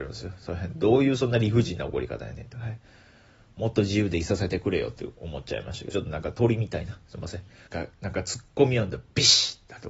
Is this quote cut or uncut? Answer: cut